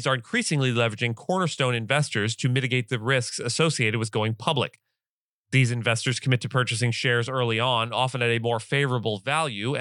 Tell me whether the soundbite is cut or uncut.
uncut